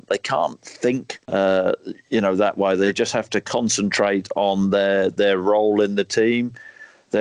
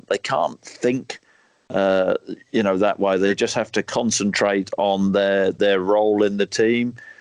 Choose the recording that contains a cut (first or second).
first